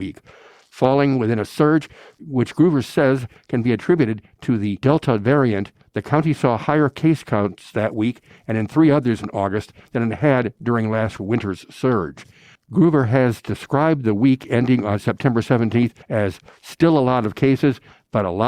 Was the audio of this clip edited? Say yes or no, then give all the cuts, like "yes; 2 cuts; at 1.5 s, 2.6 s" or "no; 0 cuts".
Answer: yes; 2 cuts; at 12.6 s, 16.0 s